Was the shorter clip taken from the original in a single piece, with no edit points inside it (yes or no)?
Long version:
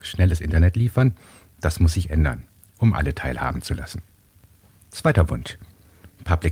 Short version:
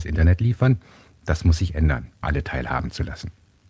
no